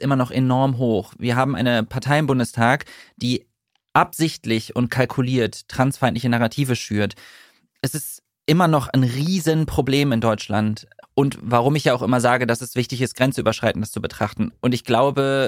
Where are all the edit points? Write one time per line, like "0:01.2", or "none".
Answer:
0:11.0
0:14.5